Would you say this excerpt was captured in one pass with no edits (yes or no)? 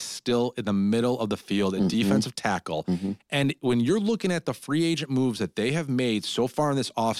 yes